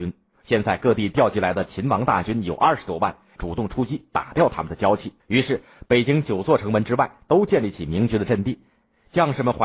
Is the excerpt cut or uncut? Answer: cut